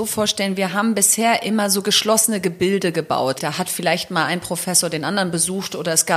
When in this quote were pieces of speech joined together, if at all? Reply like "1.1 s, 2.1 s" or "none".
3.4 s